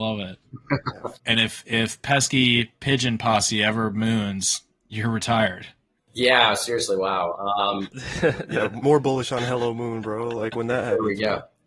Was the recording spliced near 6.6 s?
no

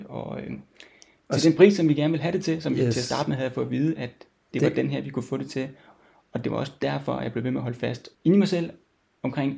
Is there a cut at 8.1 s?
yes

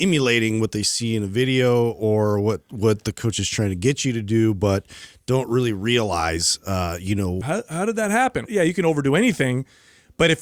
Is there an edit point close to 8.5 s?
yes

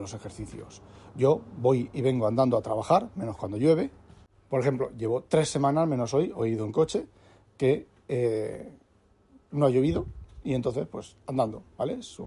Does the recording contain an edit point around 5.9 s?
no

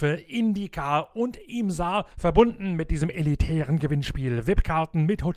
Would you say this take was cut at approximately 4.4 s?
no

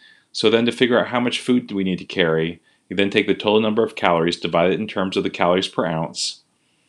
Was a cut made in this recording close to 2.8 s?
no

